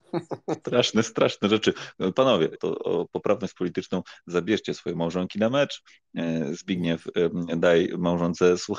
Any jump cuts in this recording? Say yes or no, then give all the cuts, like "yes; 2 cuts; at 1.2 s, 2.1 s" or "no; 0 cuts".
yes; 1 cut; at 2.6 s